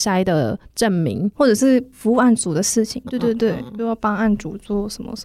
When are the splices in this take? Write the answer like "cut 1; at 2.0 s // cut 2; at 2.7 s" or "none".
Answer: cut 1; at 1.3 s // cut 2; at 3.1 s